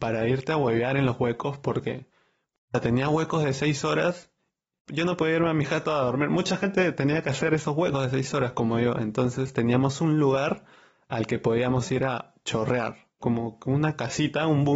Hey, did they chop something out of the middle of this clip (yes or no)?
yes